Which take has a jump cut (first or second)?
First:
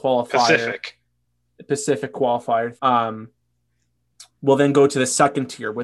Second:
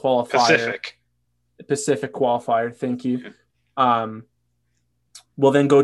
first